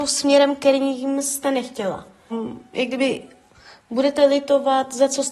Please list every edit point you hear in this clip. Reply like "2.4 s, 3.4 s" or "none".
2.3 s